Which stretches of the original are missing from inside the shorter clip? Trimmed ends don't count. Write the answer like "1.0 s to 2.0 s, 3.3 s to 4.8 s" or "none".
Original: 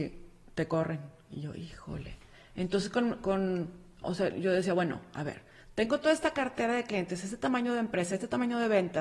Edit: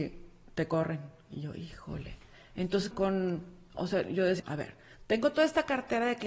2.9 s to 3.2 s, 4.7 s to 5.1 s